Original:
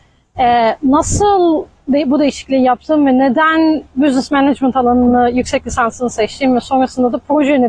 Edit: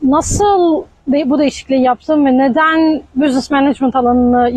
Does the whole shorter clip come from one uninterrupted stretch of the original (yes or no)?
yes